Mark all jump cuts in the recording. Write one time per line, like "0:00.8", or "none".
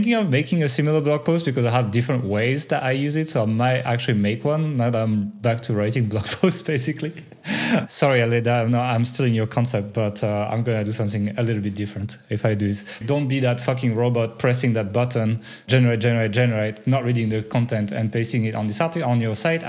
0:13.0